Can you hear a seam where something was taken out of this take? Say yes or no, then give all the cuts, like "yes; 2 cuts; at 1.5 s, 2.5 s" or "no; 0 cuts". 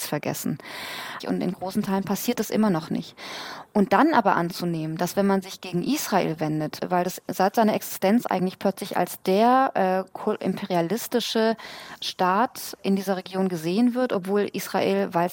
yes; 1 cut; at 1.2 s